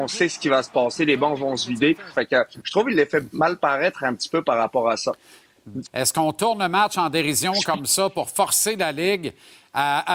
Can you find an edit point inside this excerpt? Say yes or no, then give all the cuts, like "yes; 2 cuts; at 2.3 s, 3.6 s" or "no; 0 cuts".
yes; 2 cuts; at 2.1 s, 5.8 s